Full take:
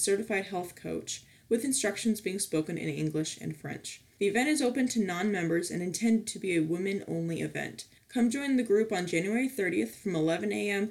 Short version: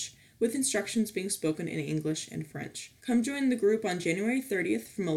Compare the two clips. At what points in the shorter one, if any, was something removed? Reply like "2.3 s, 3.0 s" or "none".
3.0 s